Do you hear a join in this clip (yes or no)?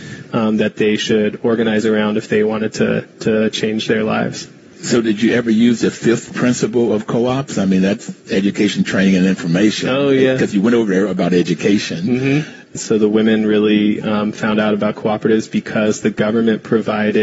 yes